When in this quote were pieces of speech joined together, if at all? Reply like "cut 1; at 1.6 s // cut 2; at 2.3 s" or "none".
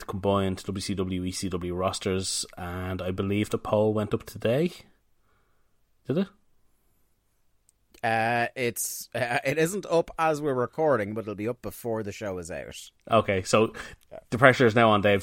none